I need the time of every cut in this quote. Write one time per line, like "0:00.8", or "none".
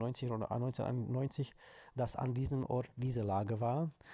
0:01.9